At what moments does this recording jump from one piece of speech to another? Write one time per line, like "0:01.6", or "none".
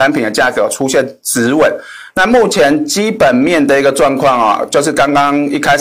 0:02.1